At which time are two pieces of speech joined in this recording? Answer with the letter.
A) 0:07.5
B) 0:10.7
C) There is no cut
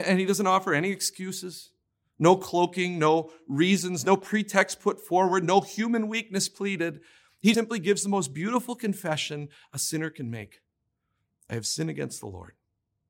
A